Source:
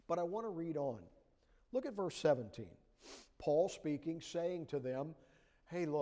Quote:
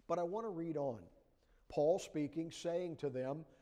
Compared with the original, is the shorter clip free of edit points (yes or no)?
no